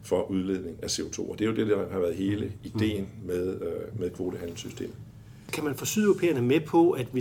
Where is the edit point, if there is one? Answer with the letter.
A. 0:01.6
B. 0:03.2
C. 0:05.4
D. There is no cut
D